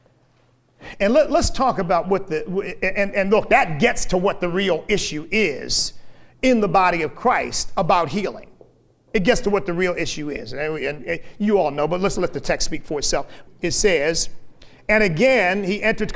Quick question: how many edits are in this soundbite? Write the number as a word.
one